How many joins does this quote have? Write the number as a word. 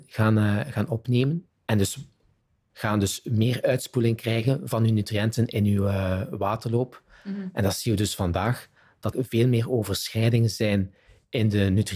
one